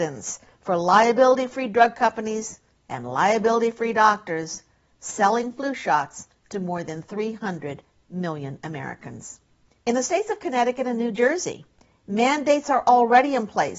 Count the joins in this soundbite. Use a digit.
1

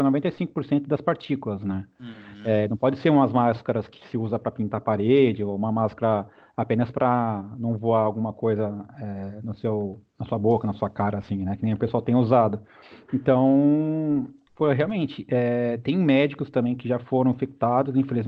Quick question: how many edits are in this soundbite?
1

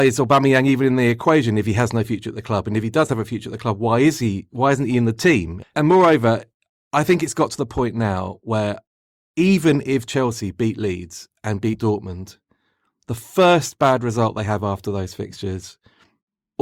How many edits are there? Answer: 1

